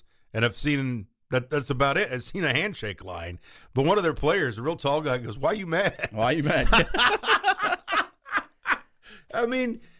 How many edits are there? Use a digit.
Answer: 0